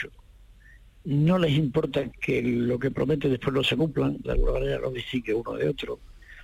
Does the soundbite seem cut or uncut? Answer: cut